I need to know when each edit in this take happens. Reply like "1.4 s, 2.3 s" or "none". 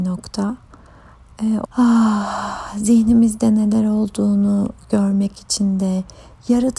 1.7 s

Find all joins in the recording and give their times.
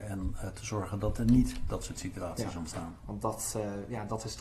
3.0 s

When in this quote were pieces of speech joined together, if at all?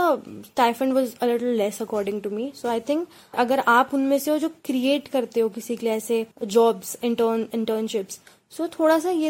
3.3 s, 6.3 s

